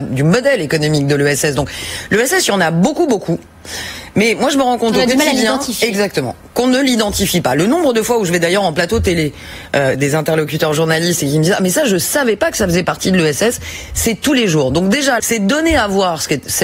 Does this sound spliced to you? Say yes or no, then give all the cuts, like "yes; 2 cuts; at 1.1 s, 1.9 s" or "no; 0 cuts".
yes; 2 cuts; at 9.9 s, 15.2 s